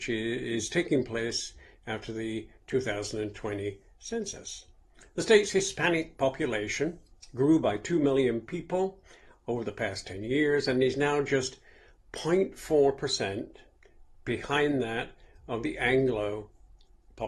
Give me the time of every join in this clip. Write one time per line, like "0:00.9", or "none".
none